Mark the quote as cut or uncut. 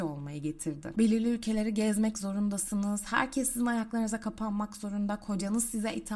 cut